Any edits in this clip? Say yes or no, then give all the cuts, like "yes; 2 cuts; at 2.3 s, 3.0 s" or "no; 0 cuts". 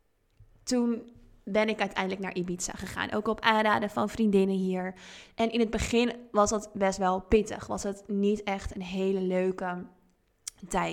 no; 0 cuts